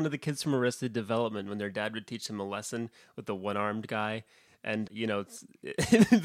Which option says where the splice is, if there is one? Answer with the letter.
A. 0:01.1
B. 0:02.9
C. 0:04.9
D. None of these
C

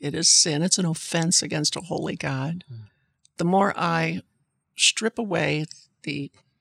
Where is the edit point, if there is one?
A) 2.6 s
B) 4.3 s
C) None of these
C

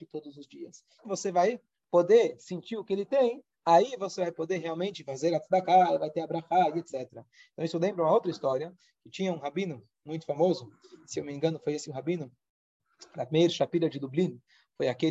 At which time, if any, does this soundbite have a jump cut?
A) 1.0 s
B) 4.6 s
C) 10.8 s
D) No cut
A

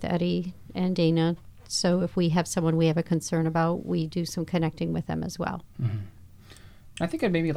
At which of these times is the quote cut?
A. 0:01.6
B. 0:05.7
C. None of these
C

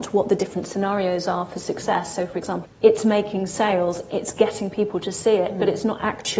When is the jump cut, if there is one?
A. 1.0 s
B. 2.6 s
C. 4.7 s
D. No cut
B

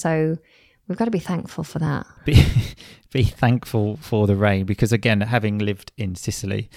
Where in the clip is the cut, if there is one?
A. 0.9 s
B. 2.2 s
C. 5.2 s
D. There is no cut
B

